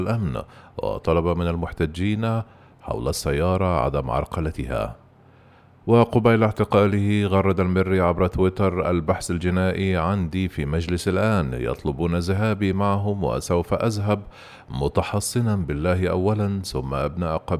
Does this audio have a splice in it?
no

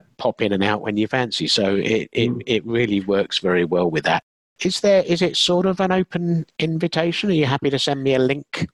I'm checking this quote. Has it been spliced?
no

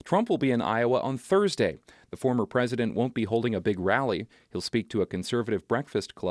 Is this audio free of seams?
yes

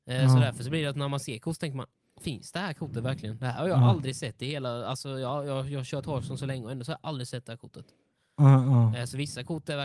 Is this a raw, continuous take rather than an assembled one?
yes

